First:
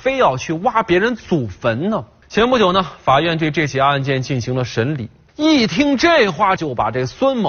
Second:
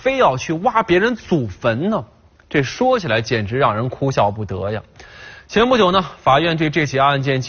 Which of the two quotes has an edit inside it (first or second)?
first